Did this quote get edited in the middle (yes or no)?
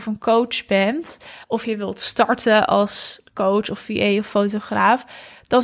no